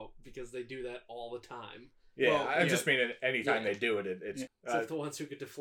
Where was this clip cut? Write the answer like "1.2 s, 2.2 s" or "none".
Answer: 4.5 s